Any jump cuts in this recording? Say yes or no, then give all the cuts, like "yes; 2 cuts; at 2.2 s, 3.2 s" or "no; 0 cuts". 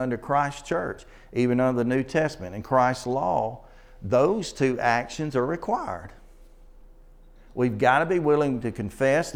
no; 0 cuts